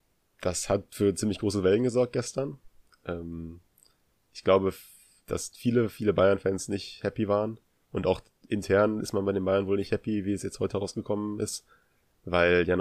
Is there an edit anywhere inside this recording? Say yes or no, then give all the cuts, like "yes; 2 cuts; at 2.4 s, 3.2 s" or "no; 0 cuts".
no; 0 cuts